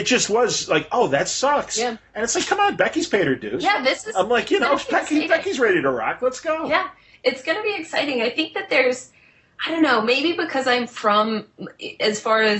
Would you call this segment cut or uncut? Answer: uncut